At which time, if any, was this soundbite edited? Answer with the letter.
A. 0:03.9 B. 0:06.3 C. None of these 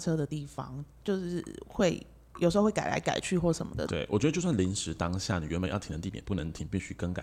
A